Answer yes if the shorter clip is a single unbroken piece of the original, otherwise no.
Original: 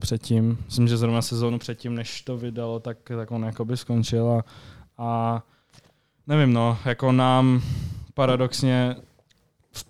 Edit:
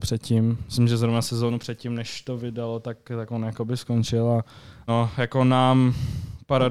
no